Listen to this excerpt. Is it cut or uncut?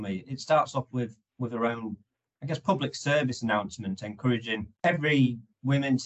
cut